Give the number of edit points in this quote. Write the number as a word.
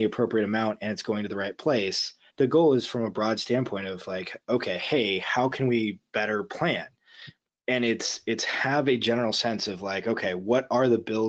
one